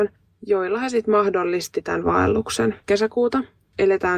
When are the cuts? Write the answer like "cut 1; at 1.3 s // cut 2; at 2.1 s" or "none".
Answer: cut 1; at 2.8 s

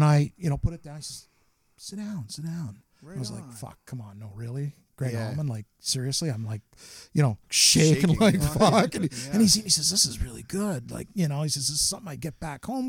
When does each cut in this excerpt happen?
none

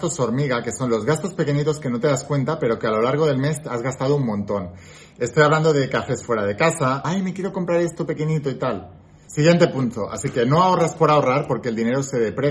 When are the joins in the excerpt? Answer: cut 1; at 7.0 s // cut 2; at 9.3 s

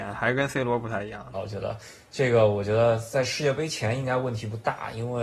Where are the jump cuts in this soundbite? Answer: cut 1; at 1.3 s

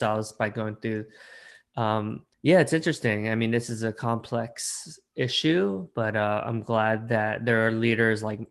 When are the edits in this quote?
cut 1; at 2.3 s

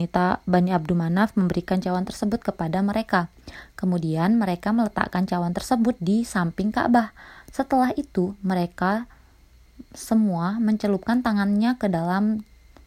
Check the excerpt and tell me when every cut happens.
none

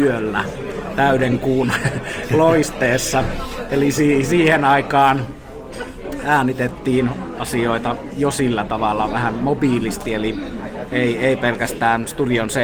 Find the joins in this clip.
none

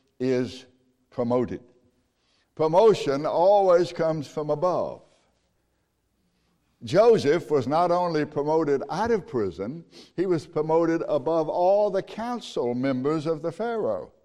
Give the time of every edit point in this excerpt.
cut 1; at 2.4 s

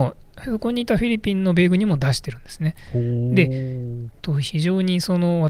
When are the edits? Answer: cut 1; at 4.1 s

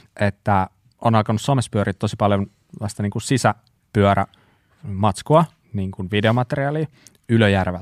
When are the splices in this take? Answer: none

